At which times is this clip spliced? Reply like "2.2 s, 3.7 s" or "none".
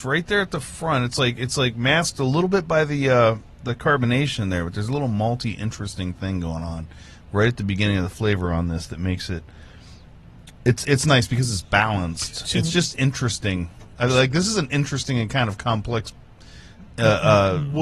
none